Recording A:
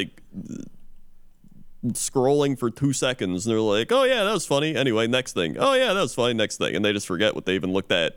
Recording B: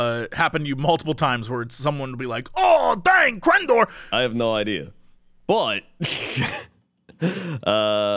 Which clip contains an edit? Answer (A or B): B